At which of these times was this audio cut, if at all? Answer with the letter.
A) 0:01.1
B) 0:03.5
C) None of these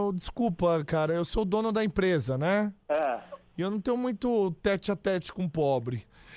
C